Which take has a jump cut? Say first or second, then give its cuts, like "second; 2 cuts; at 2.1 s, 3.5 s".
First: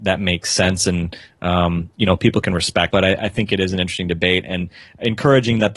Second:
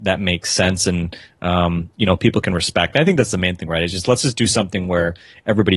first; 1 cut; at 2.9 s